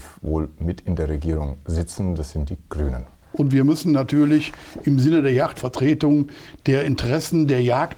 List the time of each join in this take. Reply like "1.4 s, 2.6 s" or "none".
3.3 s, 5.5 s